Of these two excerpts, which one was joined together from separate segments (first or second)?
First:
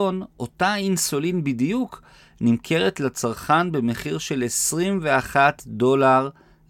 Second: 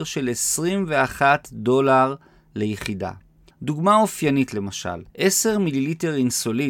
second